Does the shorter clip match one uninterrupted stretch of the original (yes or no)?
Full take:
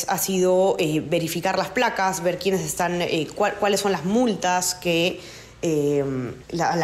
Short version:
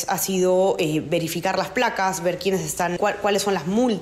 no